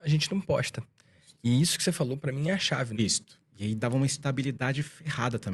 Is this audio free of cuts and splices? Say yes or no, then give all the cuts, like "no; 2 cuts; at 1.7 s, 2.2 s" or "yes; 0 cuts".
no; 1 cut; at 2.9 s